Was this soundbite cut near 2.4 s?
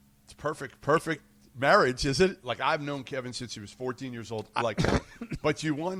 yes; 2 cuts; at 2.4 s, 4.6 s

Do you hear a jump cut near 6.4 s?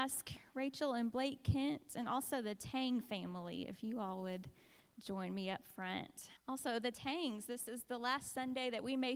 yes; 1 cut; at 6.4 s

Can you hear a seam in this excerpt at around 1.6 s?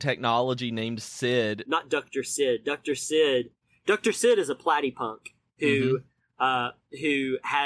yes; 1 cut; at 1.6 s

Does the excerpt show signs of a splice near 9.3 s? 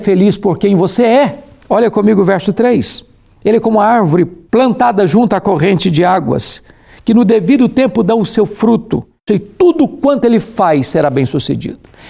yes; 2 cuts; at 4.5 s, 9.3 s

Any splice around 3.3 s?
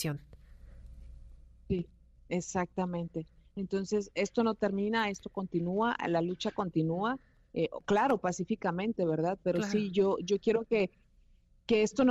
no; 0 cuts

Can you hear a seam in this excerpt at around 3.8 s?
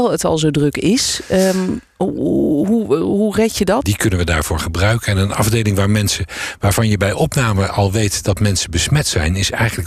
yes; 1 cut; at 3.8 s

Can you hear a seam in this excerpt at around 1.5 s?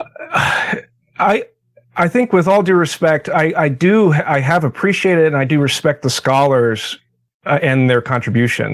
no; 0 cuts

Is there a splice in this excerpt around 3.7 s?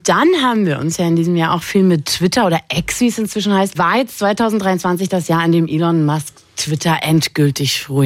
yes; 1 cut; at 3.7 s

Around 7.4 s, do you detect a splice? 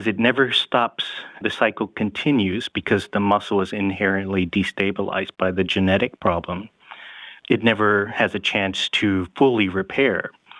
no; 0 cuts

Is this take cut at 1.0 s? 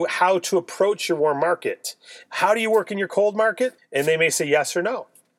no; 2 cuts; at 2.2 s, 3.8 s

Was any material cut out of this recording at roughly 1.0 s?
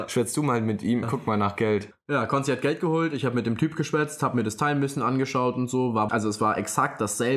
yes; 2 cuts; at 1.0 s, 6.1 s

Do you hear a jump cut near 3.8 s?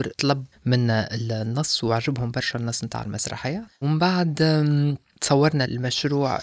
yes; 1 cut; at 3.8 s

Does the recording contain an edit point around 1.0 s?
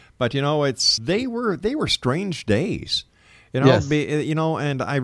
yes; 1 cut; at 1.0 s

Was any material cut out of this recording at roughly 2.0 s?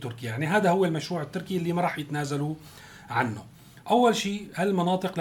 no; 1 cut; at 3.8 s

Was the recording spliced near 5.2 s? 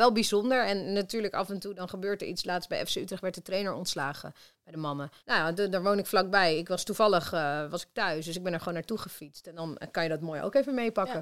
yes; 1 cut; at 5.2 s

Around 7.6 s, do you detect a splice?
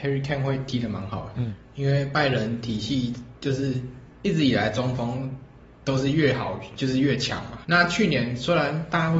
yes; 2 cuts; at 4.1 s, 7.6 s

